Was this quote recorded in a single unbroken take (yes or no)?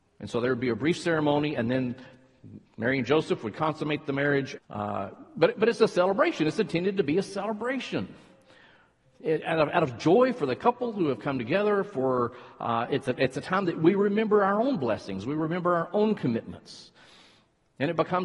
no